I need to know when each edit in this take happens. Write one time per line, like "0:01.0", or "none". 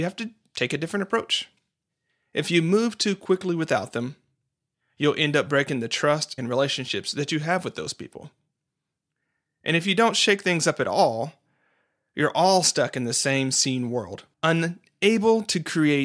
0:06.4
0:14.3